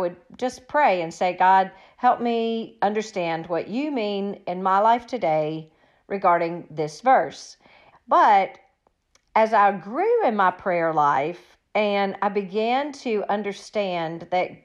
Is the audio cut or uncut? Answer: cut